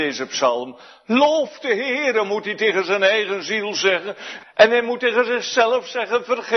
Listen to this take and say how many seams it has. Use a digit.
1